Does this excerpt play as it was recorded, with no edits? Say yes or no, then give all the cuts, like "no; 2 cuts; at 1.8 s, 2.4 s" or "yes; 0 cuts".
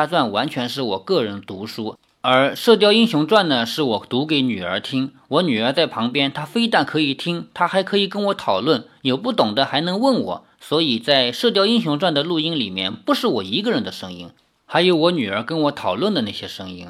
yes; 0 cuts